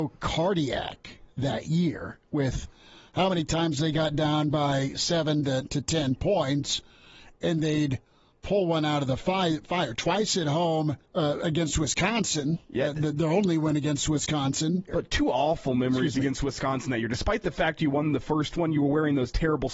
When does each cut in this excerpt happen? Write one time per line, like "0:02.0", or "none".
0:11.0
0:14.9